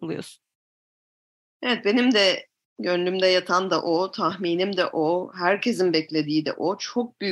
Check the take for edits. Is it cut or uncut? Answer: uncut